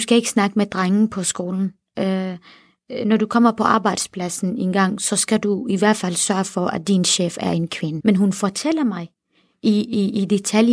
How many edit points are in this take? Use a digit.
1